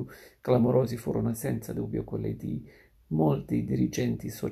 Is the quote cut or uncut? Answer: uncut